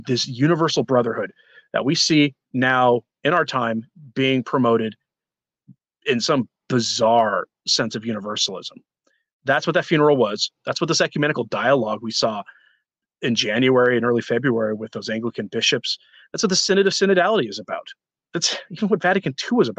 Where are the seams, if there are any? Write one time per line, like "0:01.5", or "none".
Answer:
none